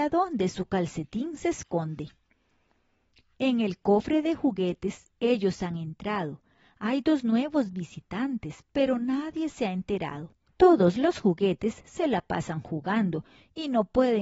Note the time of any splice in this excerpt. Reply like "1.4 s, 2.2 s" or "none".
10.5 s